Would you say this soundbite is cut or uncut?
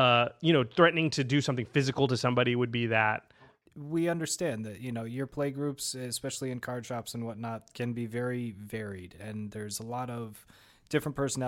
uncut